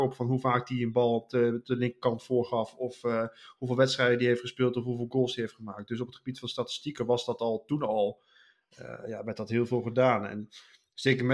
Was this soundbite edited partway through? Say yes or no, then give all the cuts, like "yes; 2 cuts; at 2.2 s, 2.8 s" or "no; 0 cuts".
no; 0 cuts